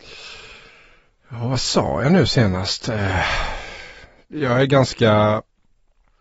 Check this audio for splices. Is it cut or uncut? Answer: uncut